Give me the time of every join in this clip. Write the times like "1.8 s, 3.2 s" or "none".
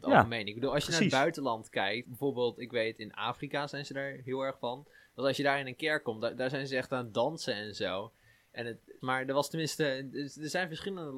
2.0 s, 9.0 s